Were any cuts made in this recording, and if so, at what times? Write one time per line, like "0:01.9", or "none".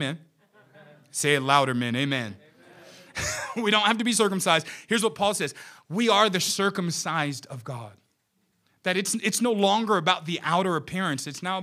none